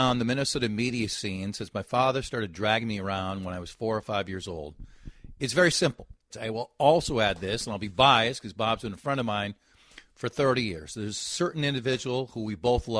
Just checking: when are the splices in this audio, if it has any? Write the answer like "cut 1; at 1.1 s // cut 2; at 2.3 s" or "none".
cut 1; at 6.3 s

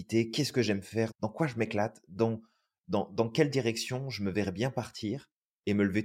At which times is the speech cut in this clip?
cut 1; at 1.1 s

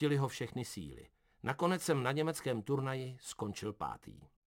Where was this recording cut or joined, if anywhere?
cut 1; at 1.3 s

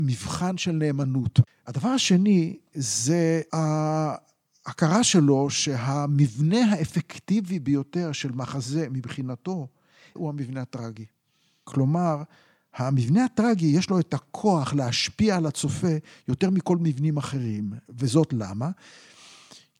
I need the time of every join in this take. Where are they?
cut 1; at 1.5 s

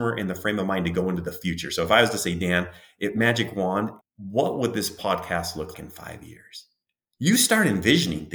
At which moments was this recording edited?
cut 1; at 4.0 s // cut 2; at 5.7 s

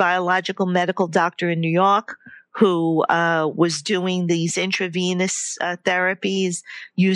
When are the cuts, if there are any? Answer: none

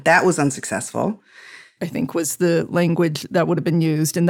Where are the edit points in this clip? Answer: cut 1; at 1.8 s

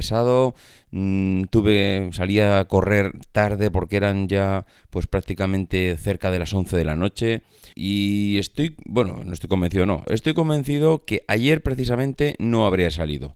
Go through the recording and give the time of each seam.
cut 1; at 7.7 s // cut 2; at 10.0 s

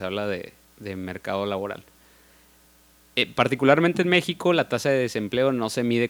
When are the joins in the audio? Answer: none

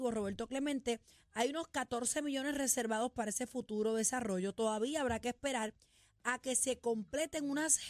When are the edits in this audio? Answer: none

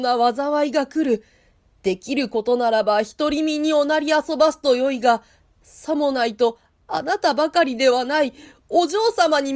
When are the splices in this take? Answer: none

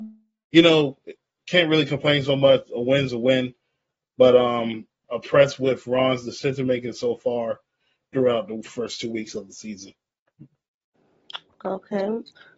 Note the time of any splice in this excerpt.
cut 1; at 5.0 s

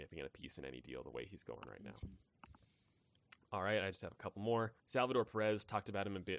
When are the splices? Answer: cut 1; at 4.8 s

